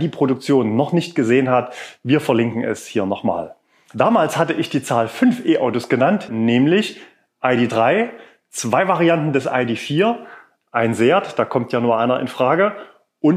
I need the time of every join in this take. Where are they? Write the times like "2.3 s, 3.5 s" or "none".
6.3 s